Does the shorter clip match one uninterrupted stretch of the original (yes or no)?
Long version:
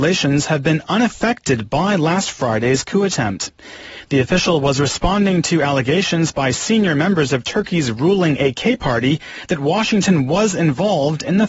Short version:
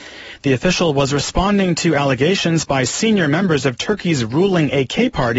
yes